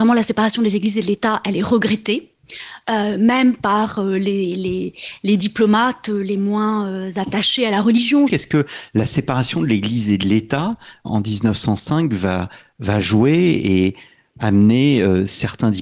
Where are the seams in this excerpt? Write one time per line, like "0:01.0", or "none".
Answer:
0:08.3
0:11.0